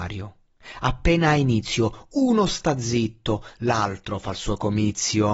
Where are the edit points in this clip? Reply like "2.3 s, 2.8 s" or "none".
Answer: none